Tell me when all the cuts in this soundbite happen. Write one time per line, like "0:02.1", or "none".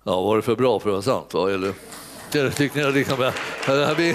0:02.3